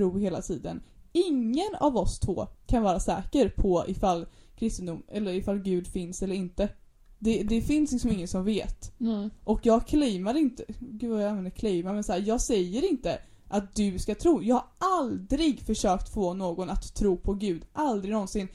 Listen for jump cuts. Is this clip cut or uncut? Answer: uncut